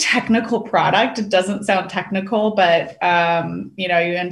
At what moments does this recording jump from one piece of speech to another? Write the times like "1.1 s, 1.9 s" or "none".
none